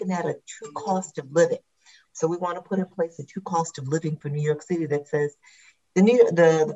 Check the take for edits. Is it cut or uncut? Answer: cut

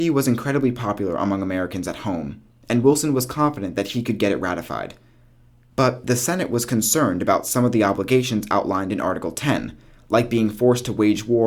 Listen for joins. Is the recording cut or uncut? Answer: uncut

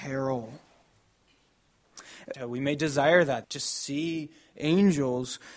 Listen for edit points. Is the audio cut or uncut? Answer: cut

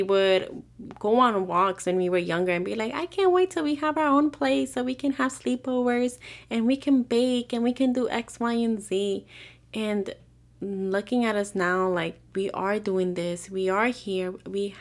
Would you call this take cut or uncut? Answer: uncut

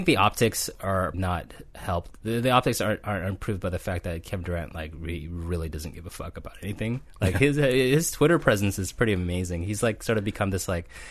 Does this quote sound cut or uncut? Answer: cut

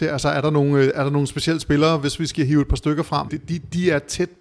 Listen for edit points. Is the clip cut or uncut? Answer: cut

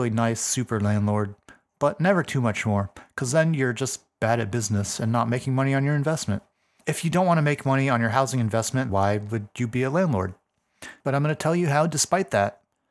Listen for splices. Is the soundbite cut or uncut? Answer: cut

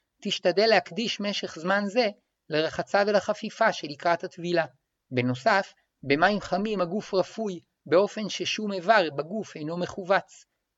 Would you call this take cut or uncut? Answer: cut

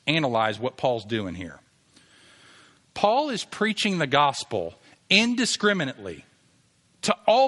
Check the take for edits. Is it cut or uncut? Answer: uncut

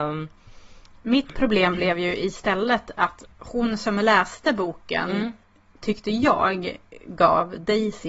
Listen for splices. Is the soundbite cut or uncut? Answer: uncut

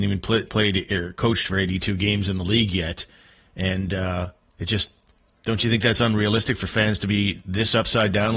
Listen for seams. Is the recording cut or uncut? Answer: uncut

